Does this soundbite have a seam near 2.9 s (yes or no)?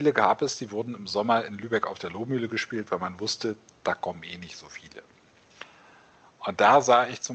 no